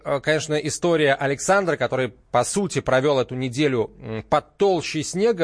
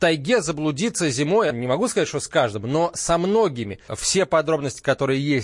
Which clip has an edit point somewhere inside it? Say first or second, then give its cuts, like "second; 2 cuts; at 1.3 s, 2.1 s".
second; 2 cuts; at 1.5 s, 3.9 s